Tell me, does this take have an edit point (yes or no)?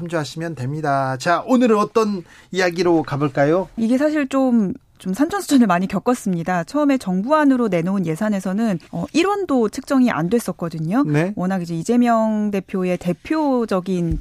yes